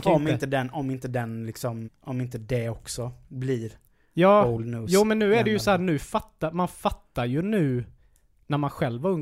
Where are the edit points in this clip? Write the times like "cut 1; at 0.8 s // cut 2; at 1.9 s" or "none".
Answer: cut 1; at 1.8 s